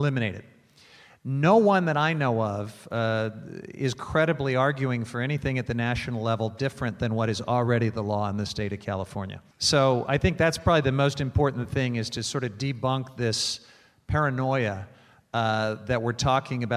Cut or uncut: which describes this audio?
cut